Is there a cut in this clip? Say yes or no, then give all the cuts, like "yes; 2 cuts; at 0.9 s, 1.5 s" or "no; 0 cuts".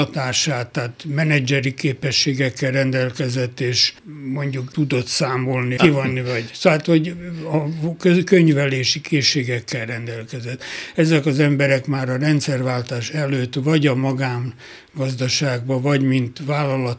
yes; 1 cut; at 5.8 s